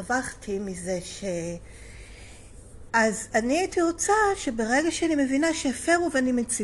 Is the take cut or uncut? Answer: cut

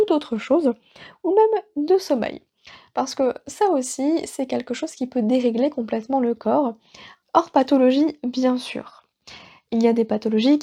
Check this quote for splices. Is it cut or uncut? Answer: cut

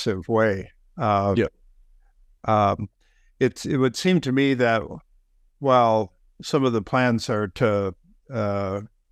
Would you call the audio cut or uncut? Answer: uncut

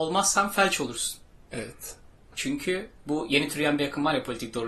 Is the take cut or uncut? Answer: uncut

